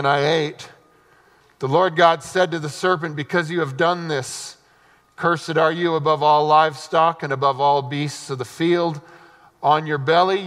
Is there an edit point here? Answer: no; 0 cuts

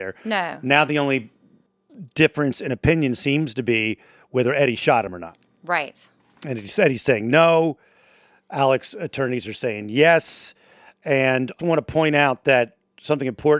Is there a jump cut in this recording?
yes; 1 cut; at 11.6 s

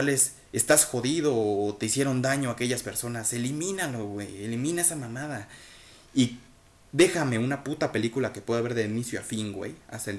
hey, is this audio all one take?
yes; 0 cuts

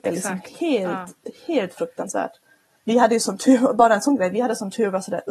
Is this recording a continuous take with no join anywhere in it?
yes; 0 cuts

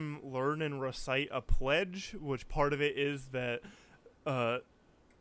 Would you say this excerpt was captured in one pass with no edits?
yes; 0 cuts

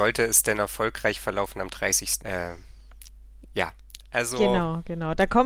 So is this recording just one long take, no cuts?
no; 1 cut; at 2.2 s

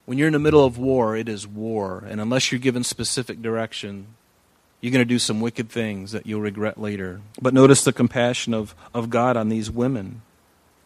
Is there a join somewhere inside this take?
yes; 1 cut; at 7.3 s

